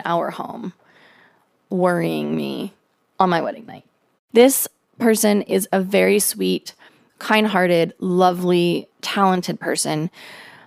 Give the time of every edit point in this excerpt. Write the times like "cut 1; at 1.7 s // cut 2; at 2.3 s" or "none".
cut 1; at 4.3 s // cut 2; at 8.9 s